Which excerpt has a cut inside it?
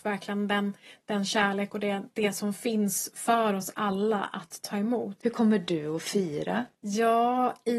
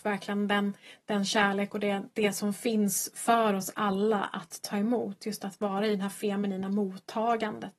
first; 2 cuts; at 5.2 s, 6.7 s

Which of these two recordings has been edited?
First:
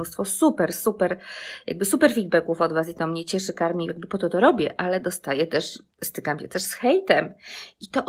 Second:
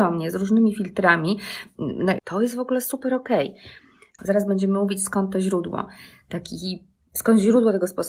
second; 2 cuts; at 2.2 s, 4.2 s

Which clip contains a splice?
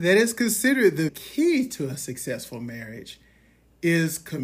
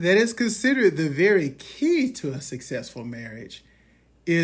first; 1 cut; at 1.1 s

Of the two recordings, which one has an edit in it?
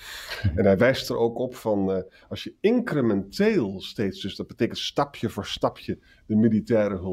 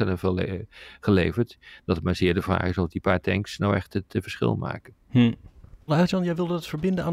second; 1 cut; at 5.9 s

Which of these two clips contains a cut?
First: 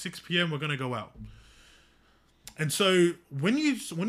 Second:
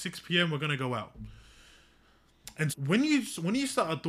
second; 1 cut; at 2.7 s

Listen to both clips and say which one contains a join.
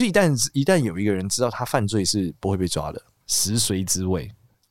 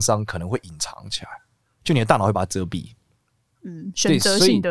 first; 1 cut; at 3.2 s

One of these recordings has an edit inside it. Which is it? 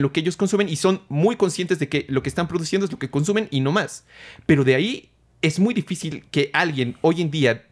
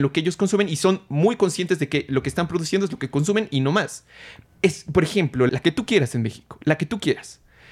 second; 2 cuts; at 4.4 s, 5.5 s

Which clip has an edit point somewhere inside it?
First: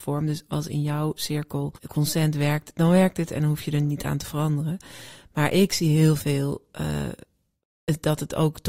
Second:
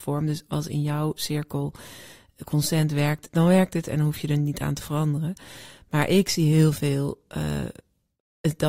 first; 1 cut; at 1.8 s

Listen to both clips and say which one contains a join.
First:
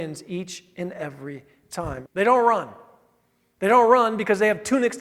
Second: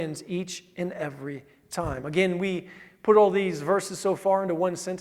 first; 1 cut; at 2.0 s

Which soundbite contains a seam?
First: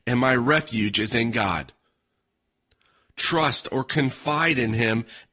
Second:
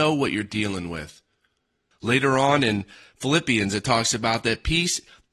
second; 1 cut; at 1.9 s

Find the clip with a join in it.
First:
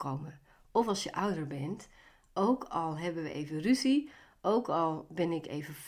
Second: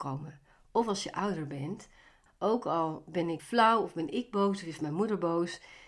second; 2 cuts; at 2.3 s, 3.4 s

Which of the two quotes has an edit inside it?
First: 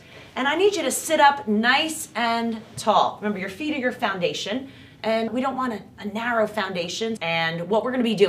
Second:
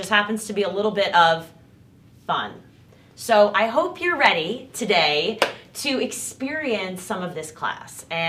first; 2 cuts; at 5.3 s, 7.2 s

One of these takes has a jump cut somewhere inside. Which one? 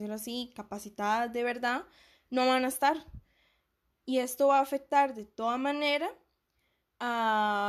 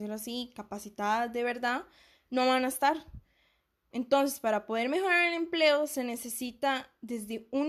second; 1 cut; at 3.9 s

